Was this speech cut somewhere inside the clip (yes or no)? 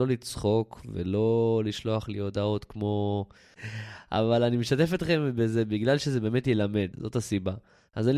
yes